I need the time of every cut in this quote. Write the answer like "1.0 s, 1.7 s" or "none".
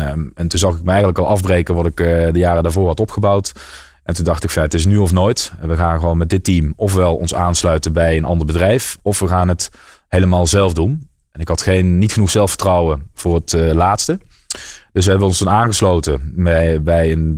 none